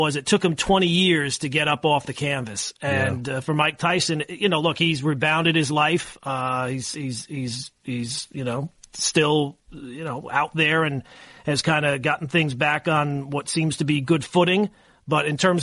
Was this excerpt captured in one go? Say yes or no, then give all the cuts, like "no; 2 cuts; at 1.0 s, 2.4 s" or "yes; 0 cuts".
yes; 0 cuts